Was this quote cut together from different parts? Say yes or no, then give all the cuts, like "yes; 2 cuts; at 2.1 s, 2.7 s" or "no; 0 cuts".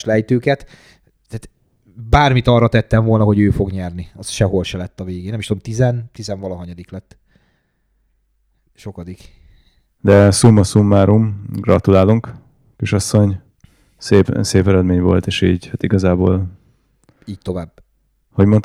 no; 0 cuts